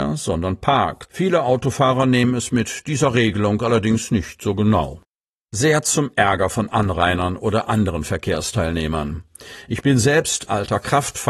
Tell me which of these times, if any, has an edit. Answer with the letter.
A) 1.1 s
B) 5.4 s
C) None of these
A